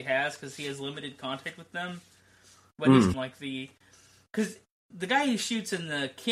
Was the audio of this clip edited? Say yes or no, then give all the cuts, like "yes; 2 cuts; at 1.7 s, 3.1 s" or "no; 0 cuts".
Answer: yes; 1 cut; at 3.1 s